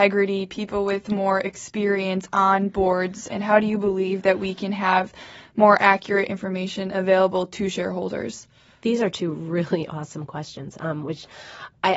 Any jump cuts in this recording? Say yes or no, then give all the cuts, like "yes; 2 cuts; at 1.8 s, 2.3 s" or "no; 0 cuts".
no; 0 cuts